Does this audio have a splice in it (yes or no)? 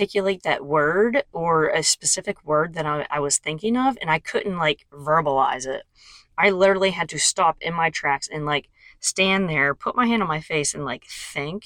no